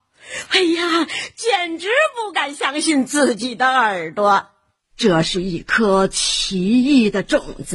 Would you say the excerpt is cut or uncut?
uncut